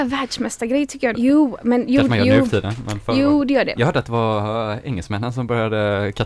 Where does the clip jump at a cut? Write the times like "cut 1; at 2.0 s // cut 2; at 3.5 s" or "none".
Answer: cut 1; at 1.1 s // cut 2; at 3.8 s